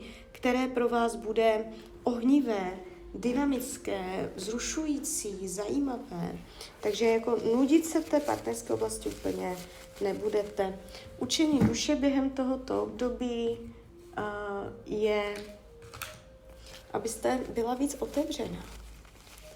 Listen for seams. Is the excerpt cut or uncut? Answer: cut